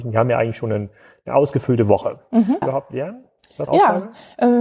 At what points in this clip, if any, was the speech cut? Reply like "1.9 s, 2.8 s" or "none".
2.6 s, 3.7 s